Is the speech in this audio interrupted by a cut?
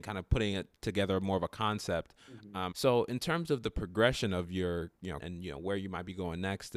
yes; 2 cuts; at 2.7 s, 5.2 s

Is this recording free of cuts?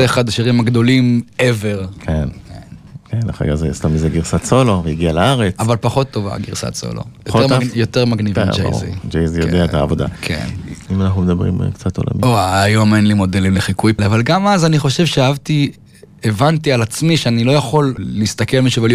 no; 3 cuts; at 10.9 s, 14.0 s, 18.0 s

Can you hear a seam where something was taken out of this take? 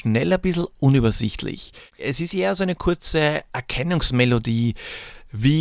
yes; 1 cut; at 2.0 s

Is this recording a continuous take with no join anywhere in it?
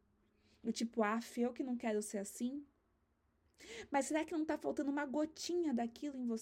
yes; 0 cuts

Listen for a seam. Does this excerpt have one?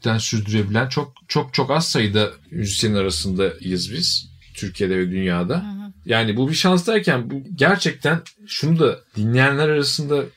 yes; 1 cut; at 6.0 s

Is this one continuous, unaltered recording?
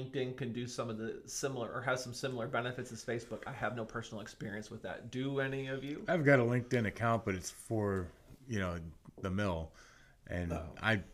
no; 1 cut; at 8.4 s

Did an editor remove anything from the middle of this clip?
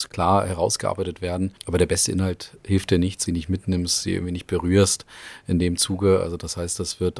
yes; 2 cuts; at 1.6 s, 3.3 s

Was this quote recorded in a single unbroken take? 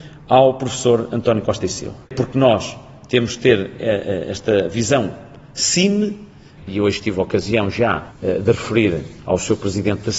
no; 3 cuts; at 2.1 s, 6.6 s, 8.1 s

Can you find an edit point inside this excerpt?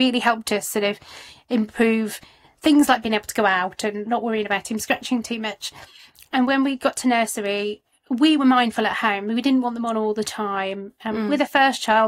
no; 0 cuts

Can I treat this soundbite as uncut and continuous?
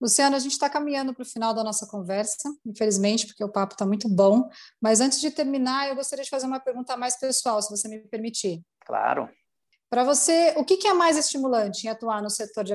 yes; 0 cuts

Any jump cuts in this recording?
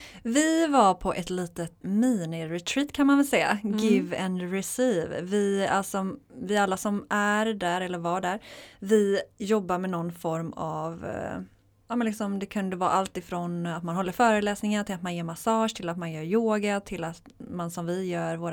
yes; 1 cut; at 1.8 s

